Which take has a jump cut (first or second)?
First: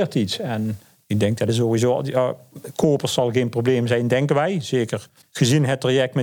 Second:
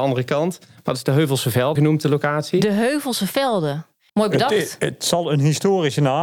second